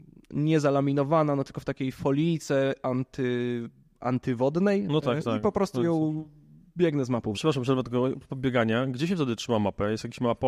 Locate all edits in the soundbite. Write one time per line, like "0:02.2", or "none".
0:05.0
0:07.3